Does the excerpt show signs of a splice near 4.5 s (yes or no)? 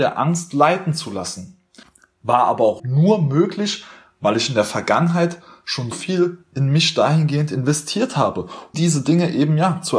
no